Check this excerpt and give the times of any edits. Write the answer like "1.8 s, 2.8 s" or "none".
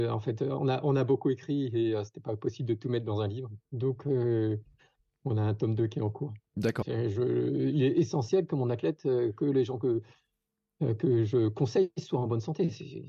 3.6 s, 6.8 s